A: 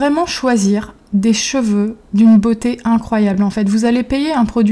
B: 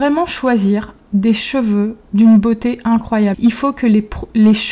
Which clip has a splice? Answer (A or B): B